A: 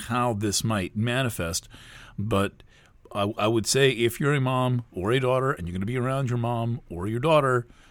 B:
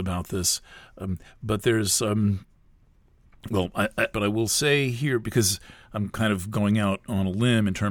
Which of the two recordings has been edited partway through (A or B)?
B